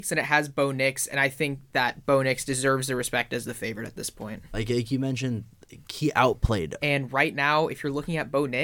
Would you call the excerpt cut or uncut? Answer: cut